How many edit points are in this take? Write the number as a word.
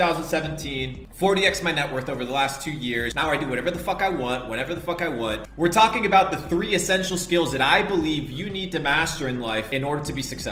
zero